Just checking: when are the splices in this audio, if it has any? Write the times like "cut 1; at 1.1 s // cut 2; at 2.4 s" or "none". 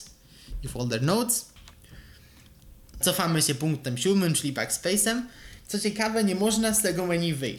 cut 1; at 3.0 s